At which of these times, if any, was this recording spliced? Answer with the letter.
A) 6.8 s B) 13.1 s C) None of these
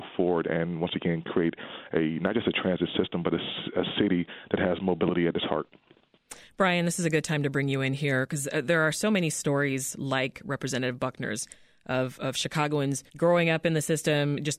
B